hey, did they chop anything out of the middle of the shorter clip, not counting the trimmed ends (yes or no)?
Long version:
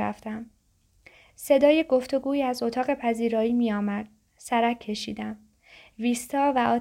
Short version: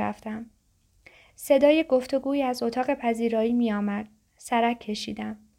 no